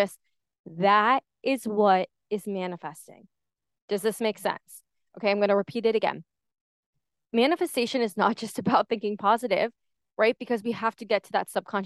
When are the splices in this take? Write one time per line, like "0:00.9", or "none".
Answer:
none